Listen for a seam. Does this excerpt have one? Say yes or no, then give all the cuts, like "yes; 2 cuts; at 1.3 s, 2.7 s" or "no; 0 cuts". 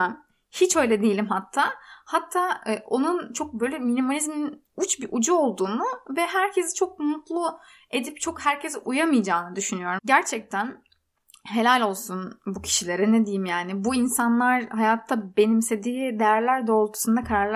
yes; 1 cut; at 10.0 s